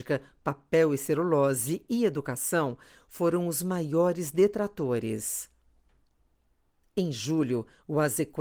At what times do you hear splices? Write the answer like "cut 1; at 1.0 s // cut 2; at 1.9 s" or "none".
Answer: none